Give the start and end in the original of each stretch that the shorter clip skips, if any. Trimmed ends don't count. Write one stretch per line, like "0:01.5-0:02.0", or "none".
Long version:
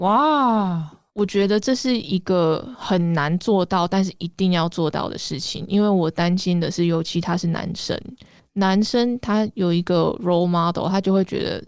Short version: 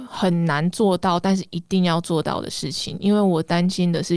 none